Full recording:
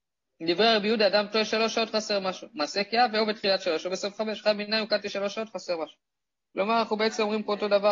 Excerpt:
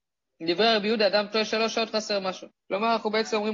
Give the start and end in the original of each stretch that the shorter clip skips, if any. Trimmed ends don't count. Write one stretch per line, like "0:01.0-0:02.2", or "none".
0:02.5-0:06.4